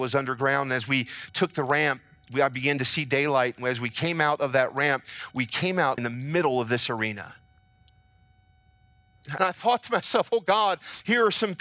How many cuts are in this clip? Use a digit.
2